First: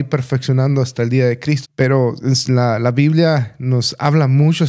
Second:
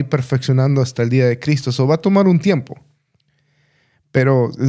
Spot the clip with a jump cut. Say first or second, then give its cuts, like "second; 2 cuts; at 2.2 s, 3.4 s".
first; 1 cut; at 1.6 s